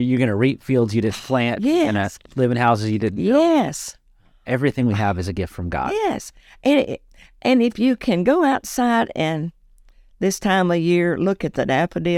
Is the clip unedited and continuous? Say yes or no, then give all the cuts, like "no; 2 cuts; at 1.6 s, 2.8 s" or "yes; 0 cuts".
yes; 0 cuts